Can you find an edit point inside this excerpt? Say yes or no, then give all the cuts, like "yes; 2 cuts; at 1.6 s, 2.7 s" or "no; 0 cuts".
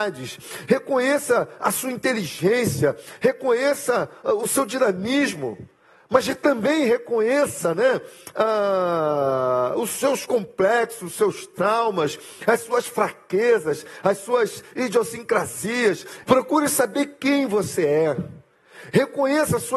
yes; 1 cut; at 16.2 s